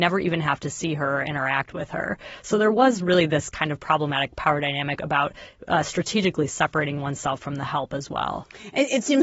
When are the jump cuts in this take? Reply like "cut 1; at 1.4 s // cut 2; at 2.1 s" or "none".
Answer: cut 1; at 5.0 s